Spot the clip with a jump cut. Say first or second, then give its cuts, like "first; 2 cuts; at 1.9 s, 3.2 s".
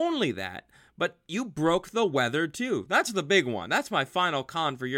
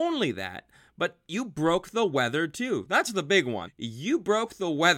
second; 1 cut; at 3.7 s